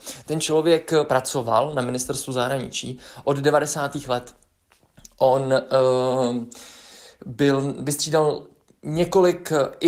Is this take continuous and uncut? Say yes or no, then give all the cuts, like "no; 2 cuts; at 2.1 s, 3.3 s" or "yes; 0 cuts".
yes; 0 cuts